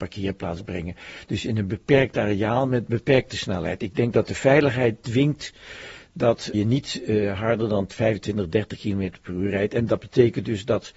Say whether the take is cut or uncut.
cut